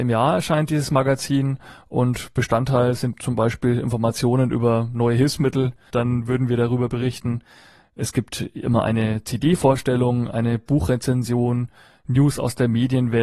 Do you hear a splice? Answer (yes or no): yes